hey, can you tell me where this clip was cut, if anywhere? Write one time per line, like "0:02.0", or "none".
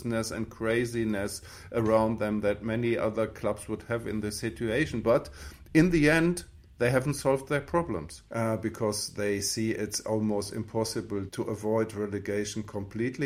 0:08.3
0:11.3

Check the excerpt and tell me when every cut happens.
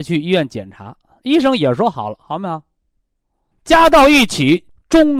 0:03.5

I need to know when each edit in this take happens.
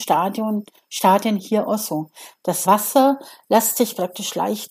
0:02.7

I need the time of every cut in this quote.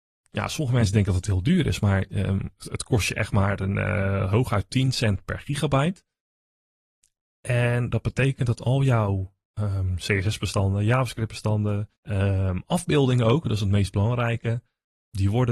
0:02.6
0:11.9

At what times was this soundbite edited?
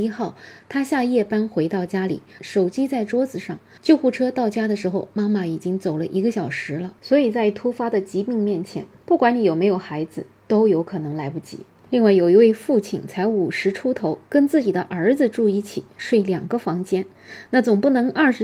0:02.4

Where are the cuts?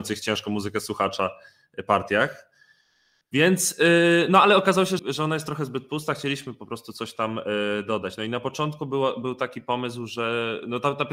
0:05.0

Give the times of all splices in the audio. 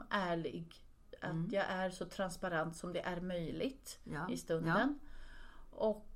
none

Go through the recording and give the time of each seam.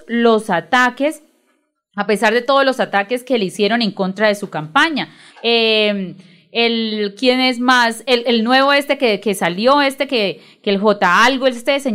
0:05.3

